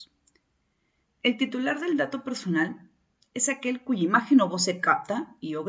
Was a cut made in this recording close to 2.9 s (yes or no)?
no